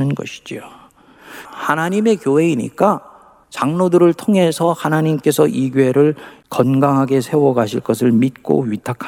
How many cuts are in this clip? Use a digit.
1